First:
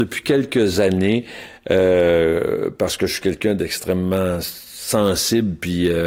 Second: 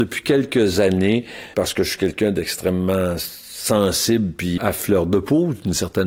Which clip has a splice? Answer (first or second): second